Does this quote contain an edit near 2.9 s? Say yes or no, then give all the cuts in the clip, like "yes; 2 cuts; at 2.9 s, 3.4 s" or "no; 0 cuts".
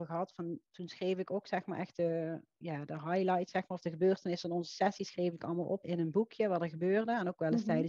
yes; 2 cuts; at 2.9 s, 5.8 s